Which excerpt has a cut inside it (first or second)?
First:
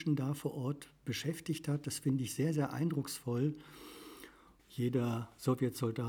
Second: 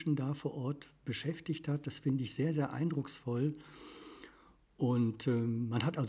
first